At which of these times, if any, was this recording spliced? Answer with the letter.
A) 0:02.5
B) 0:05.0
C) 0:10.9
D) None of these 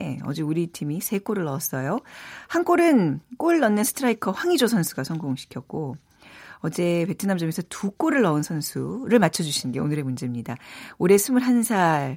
D